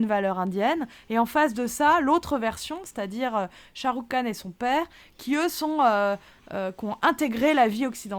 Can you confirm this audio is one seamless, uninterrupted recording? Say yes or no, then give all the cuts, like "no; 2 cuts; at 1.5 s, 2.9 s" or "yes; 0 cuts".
yes; 0 cuts